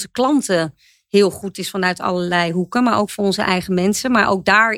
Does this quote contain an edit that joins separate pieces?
no; 0 cuts

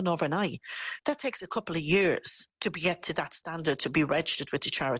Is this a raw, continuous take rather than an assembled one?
yes; 0 cuts

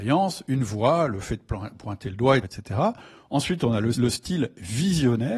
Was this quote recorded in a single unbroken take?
no; 2 cuts; at 2.4 s, 3.9 s

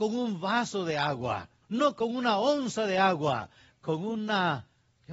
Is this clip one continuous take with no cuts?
no; 1 cut; at 1.6 s

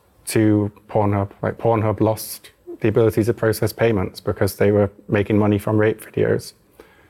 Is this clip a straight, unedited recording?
yes; 0 cuts

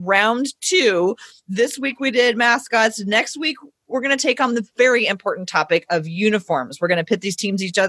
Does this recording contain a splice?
no; 0 cuts

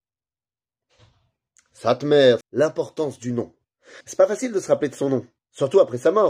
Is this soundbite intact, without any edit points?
no; 2 cuts; at 2.4 s, 4.0 s

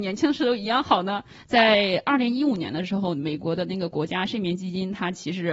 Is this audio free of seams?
no; 1 cut; at 1.4 s

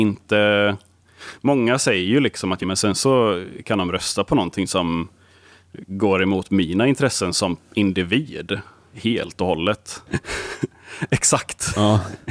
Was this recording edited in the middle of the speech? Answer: yes; 2 cuts; at 2.6 s, 10.1 s

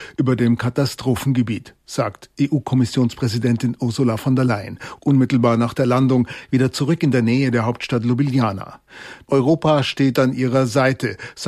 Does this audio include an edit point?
no; 0 cuts

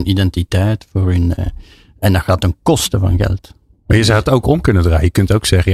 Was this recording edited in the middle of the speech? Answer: no; 0 cuts

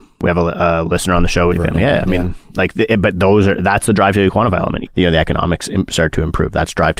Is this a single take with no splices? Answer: no; 2 cuts; at 1.5 s, 4.9 s

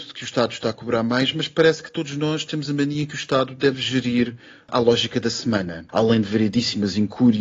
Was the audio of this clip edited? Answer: yes; 1 cut; at 5.9 s

